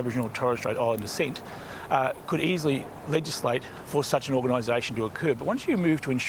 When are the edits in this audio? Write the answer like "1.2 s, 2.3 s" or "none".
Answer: none

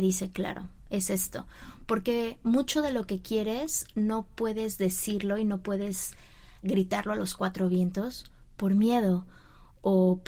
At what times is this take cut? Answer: 6.6 s

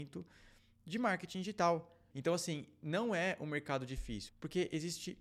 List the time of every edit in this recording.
2.1 s, 4.3 s

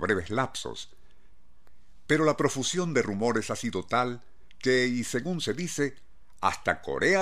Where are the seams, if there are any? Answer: 2.1 s

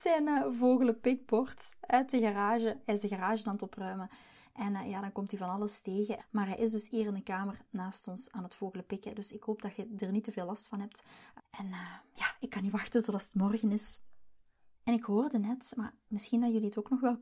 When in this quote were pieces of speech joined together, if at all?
6.2 s, 11.4 s, 14.7 s

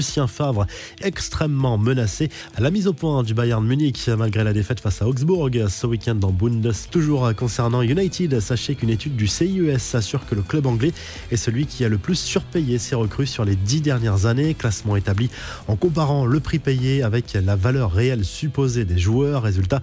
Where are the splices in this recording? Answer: 1.0 s, 6.9 s

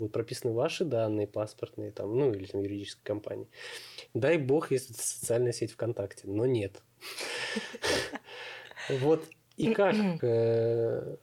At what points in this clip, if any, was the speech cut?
4.1 s, 10.2 s

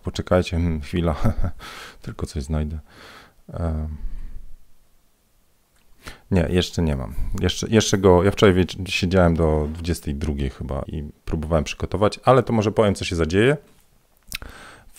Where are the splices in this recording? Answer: 10.9 s

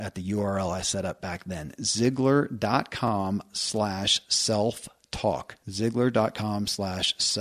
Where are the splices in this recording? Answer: 5.6 s

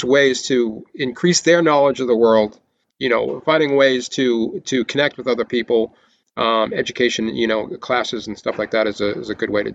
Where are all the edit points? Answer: none

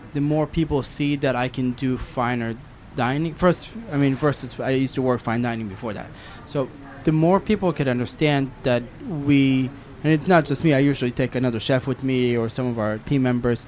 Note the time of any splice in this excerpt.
none

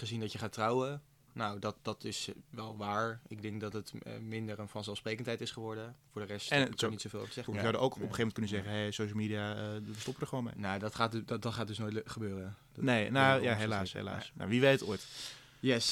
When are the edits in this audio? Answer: 7.5 s

